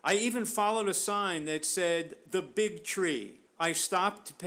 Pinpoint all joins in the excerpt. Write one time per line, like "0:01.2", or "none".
0:03.5